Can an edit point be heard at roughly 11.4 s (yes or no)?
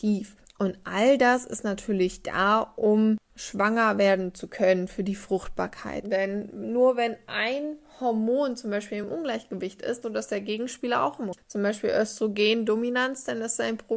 no